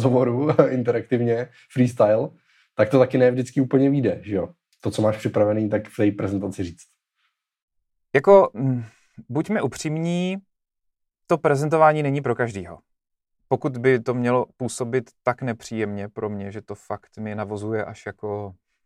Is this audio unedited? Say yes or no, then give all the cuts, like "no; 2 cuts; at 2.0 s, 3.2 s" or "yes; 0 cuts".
yes; 0 cuts